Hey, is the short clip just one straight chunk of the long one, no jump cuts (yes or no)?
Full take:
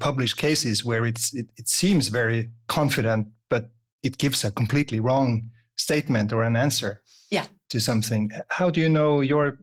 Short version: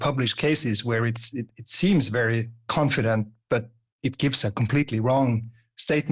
yes